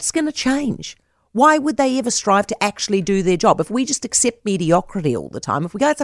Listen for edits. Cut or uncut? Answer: uncut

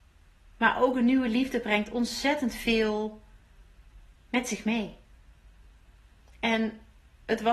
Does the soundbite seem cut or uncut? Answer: uncut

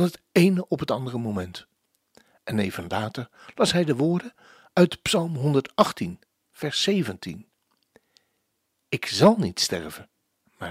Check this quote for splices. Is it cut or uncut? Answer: uncut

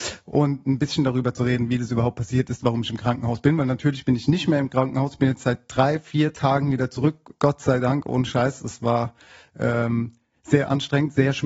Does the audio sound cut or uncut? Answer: uncut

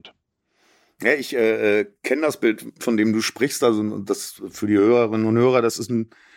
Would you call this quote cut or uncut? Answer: uncut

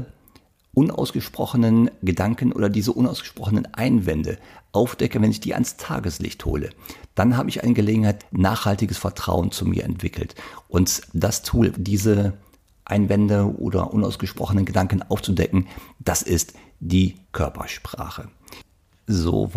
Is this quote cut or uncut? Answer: cut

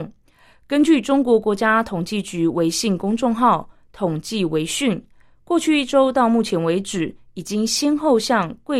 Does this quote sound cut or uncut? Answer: uncut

